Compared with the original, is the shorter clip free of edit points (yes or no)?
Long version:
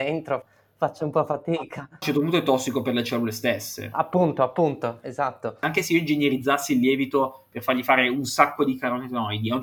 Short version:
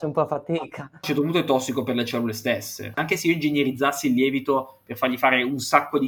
no